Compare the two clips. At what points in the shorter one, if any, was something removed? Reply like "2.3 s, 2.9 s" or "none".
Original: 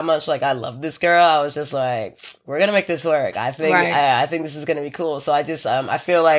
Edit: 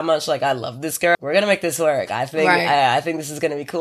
1.1 s

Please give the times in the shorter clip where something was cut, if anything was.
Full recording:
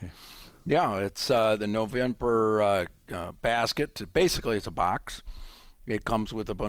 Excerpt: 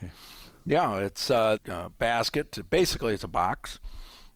1.6 s

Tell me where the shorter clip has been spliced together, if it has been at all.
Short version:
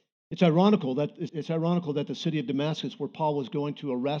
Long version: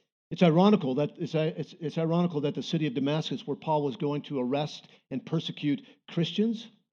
1.3 s

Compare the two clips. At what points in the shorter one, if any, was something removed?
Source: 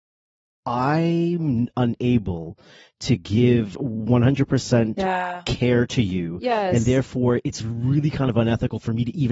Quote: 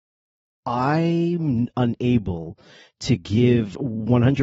none

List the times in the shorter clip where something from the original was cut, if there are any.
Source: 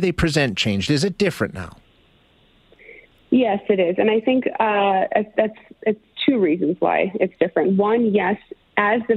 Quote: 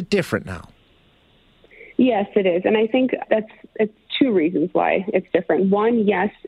1.9 s, 3.2 s

